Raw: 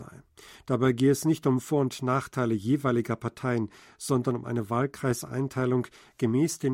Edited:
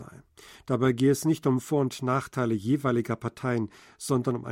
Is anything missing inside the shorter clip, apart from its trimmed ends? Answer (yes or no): no